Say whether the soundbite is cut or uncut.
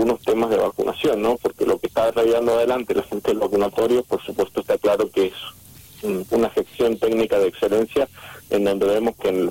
cut